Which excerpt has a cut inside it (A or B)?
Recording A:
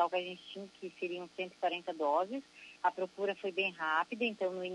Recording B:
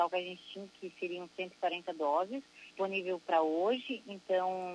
B